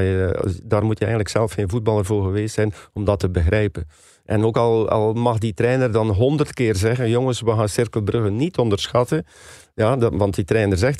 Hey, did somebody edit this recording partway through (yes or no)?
no